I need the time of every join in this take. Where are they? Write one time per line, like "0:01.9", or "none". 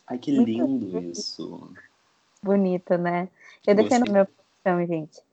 0:04.0

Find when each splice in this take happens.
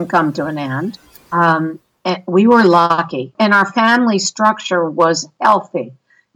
0:01.2
0:03.3

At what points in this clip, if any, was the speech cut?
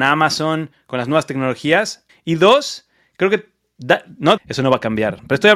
0:02.1
0:04.4

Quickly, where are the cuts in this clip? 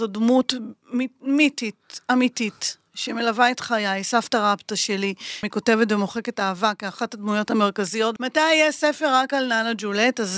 0:05.4
0:08.2

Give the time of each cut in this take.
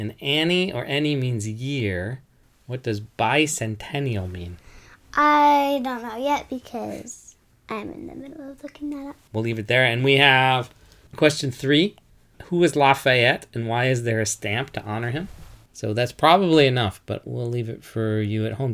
0:09.3
0:15.7
0:17.2

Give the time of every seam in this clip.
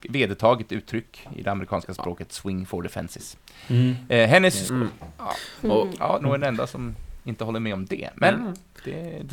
0:04.7
0:06.2

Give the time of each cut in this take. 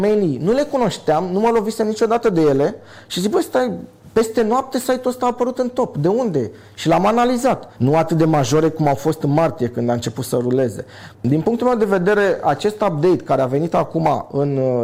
0:07.7
0:11.1

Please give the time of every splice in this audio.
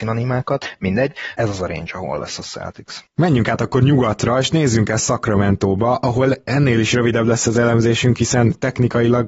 0:01.4

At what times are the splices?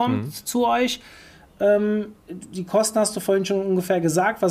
0:02.2

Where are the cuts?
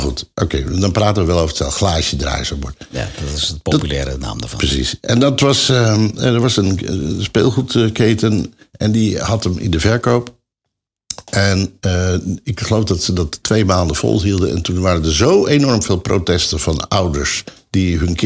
none

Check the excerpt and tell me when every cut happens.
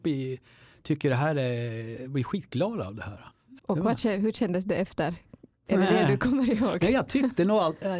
0:03.6

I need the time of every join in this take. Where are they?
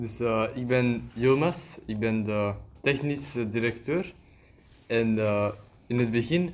none

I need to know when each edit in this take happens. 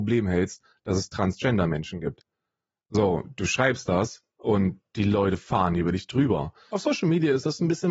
0:06.7

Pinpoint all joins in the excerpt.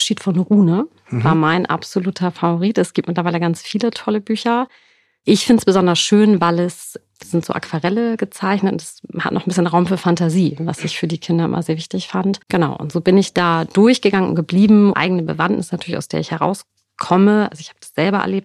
0:12.4
0:14.9

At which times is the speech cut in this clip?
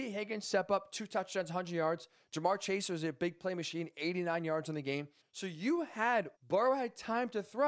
0:05.2
0:06.4

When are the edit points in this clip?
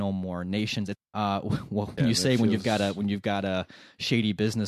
0:01.0
0:02.0

